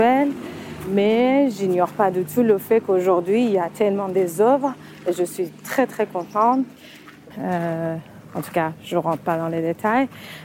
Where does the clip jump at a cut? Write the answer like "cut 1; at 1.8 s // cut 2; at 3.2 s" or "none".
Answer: cut 1; at 7.3 s